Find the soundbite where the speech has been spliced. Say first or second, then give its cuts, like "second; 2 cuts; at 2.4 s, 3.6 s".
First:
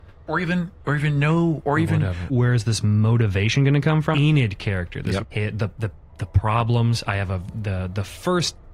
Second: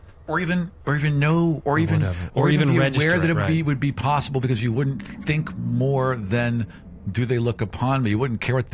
first; 3 cuts; at 2.3 s, 4.1 s, 5.2 s